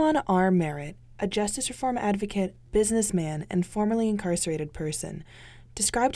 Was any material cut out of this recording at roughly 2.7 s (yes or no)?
yes